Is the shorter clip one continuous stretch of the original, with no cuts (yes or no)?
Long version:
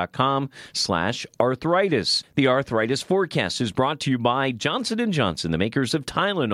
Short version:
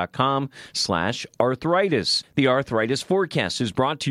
yes